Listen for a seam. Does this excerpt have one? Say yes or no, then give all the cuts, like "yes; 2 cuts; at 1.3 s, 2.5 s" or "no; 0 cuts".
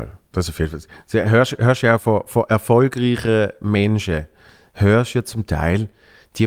no; 0 cuts